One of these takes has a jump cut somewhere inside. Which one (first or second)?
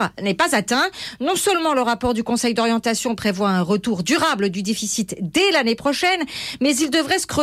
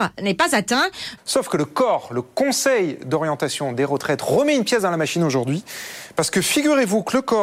second